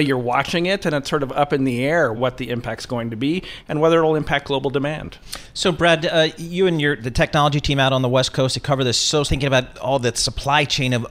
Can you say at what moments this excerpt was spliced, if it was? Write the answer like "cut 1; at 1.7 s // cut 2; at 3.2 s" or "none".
cut 1; at 2.1 s // cut 2; at 9.2 s